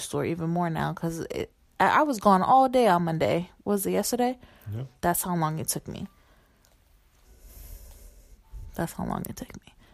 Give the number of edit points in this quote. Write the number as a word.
one